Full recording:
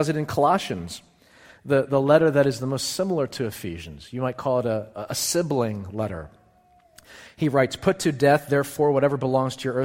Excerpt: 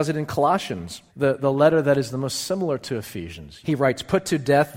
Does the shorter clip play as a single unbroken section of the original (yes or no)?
no